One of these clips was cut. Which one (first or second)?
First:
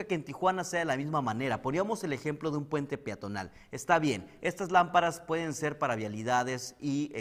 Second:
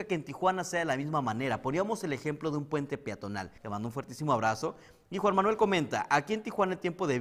second